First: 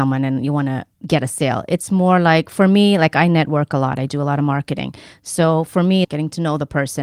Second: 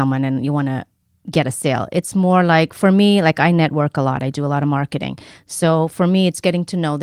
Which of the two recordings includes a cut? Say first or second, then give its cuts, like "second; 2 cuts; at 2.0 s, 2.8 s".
first; 2 cuts; at 0.9 s, 6.0 s